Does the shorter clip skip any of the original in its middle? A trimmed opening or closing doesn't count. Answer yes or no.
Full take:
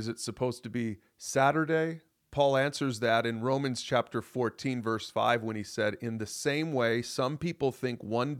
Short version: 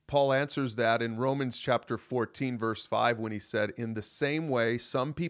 no